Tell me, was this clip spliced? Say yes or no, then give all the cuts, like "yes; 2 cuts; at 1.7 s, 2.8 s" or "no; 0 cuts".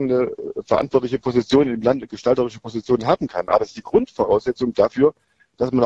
no; 0 cuts